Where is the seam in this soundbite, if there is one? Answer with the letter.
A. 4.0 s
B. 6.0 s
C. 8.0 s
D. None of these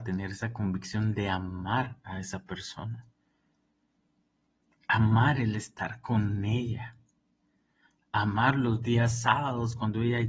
D